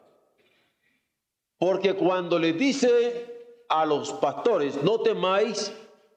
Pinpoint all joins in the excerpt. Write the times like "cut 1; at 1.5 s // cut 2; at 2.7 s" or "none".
none

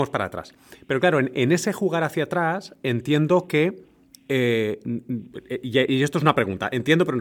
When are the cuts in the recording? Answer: none

